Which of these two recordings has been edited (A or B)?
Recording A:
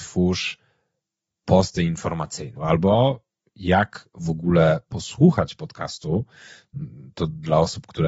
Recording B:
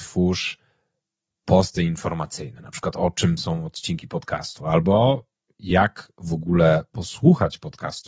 A